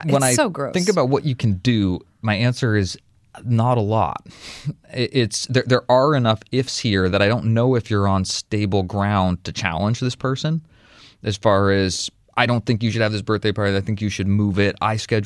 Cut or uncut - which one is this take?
uncut